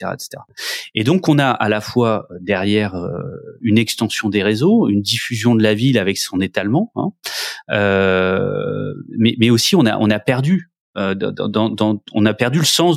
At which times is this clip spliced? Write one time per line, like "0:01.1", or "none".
none